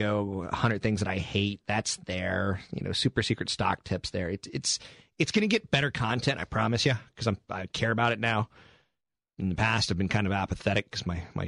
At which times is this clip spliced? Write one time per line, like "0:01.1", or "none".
none

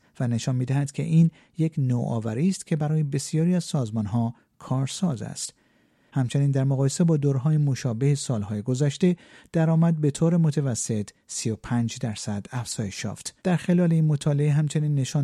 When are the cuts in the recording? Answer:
0:06.1
0:13.4

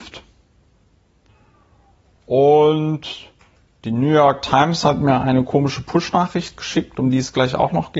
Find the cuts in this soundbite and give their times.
none

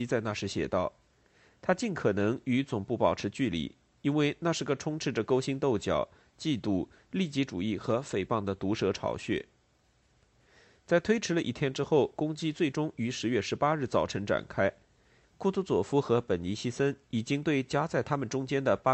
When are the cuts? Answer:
0:15.2

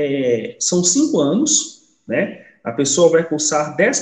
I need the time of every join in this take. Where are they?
none

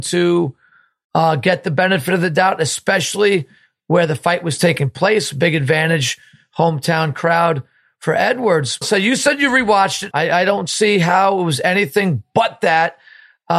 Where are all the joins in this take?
0:08.8
0:10.1

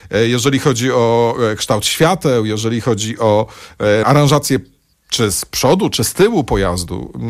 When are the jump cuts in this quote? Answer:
0:04.0

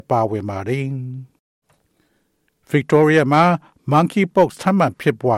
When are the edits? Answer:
none

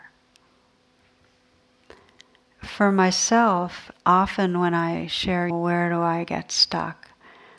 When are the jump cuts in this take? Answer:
0:03.9
0:05.5

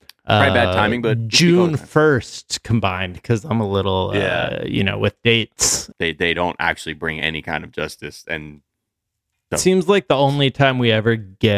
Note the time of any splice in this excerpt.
0:05.9
0:09.5

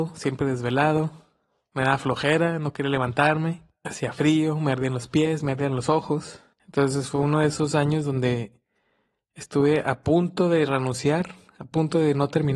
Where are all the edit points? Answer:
0:06.6

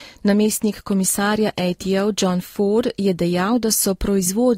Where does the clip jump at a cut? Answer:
none

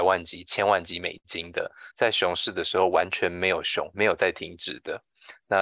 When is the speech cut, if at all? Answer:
0:01.9
0:03.9

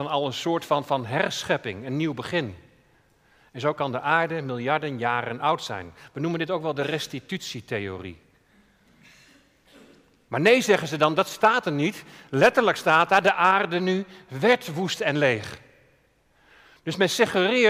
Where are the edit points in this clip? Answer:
0:10.3

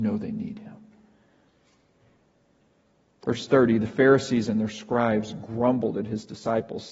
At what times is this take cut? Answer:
none

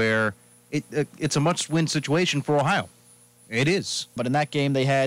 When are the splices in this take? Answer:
0:04.2

